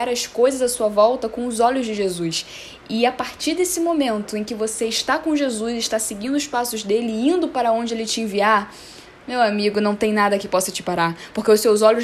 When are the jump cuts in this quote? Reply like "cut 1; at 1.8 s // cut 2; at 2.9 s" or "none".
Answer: none